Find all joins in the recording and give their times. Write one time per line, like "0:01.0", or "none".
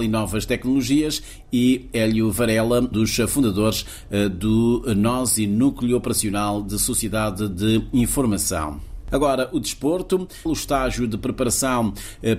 0:02.9
0:10.5